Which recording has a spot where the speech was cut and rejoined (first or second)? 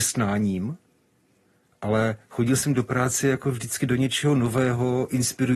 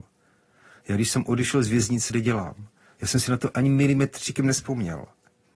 second